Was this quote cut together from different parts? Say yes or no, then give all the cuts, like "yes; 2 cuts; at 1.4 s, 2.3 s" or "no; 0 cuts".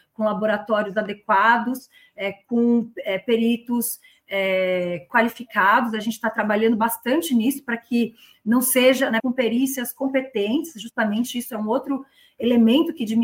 yes; 1 cut; at 9.2 s